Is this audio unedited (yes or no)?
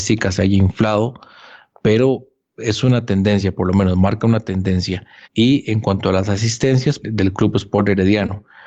no